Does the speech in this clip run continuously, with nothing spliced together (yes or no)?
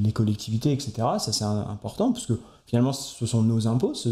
yes